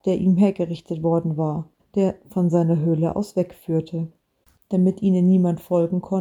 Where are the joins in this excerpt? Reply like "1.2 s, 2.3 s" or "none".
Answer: 1.8 s, 4.6 s